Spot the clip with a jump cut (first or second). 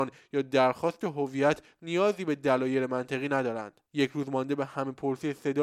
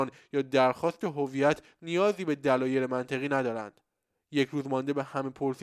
first